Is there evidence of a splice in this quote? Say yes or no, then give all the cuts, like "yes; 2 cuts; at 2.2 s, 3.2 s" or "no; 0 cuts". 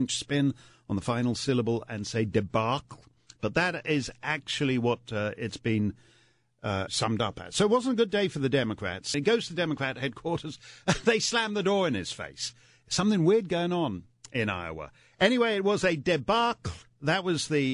yes; 2 cuts; at 6.9 s, 9.1 s